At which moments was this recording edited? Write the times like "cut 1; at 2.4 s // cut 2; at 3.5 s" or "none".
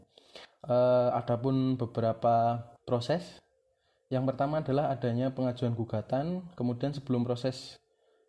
cut 1; at 2.8 s